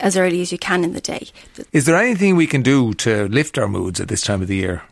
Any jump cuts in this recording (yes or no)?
yes